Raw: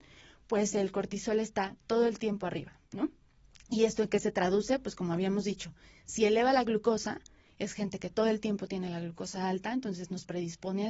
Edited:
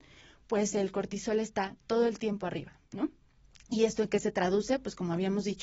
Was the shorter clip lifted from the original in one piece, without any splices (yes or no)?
yes